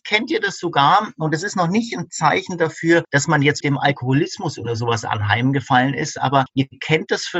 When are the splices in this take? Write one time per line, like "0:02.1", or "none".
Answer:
0:03.6

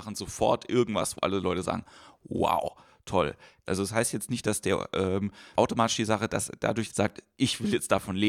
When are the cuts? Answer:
0:03.7
0:05.6
0:06.9

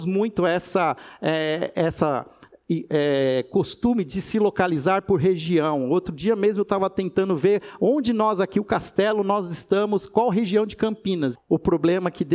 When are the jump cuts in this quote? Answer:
0:01.7
0:11.3

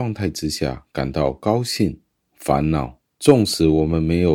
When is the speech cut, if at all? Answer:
0:02.2

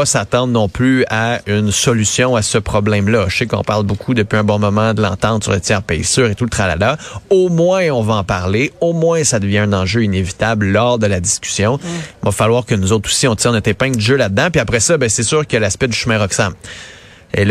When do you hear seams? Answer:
0:12.1

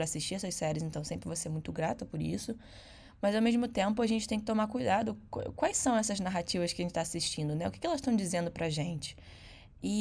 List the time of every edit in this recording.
none

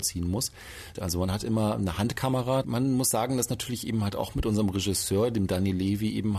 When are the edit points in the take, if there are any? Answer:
0:00.9
0:02.6

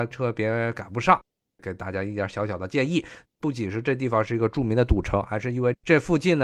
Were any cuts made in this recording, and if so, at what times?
0:03.2

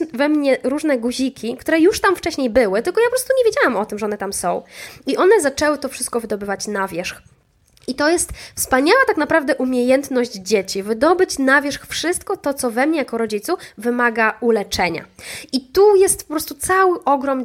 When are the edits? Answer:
none

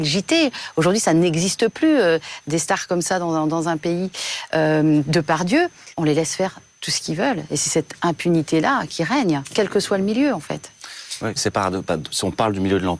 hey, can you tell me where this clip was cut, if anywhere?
0:05.9
0:11.4

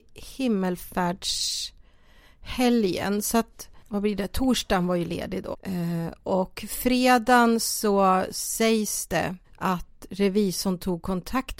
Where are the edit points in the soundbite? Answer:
0:03.8
0:05.5
0:09.4

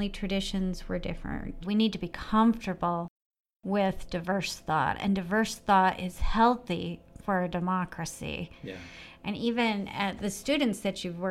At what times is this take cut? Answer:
0:01.6

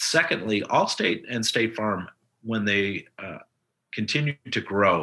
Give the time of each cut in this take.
none

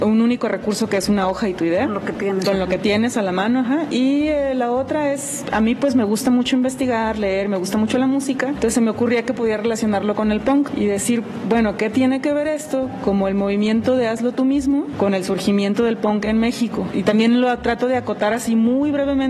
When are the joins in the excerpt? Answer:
none

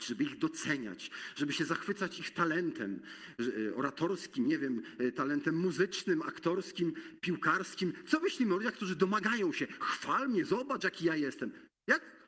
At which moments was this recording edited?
none

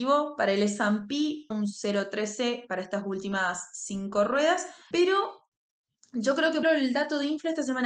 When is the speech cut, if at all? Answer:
0:01.5
0:04.9
0:06.6

